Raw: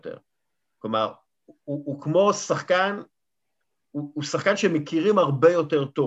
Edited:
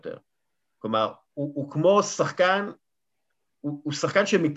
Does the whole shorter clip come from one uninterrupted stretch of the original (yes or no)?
no